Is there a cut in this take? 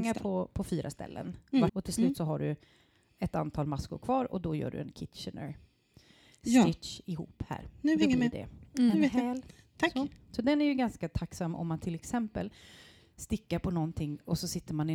yes; 1 cut; at 1.7 s

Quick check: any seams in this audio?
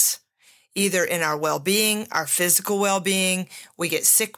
no; 0 cuts

